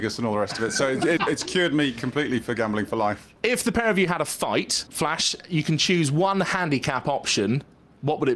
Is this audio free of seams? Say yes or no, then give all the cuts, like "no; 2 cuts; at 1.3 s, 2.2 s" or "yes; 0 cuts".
no; 1 cut; at 1.2 s